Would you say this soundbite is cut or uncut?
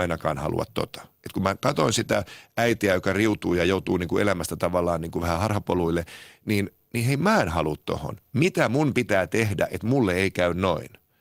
uncut